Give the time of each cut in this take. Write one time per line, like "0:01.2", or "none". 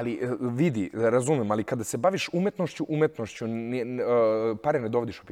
none